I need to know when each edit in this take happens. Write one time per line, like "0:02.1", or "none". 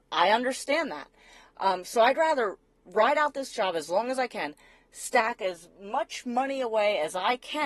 none